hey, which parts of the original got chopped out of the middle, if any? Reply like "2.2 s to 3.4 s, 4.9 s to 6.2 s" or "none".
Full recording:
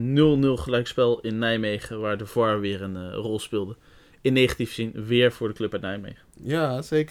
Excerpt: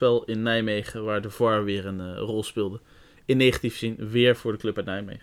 none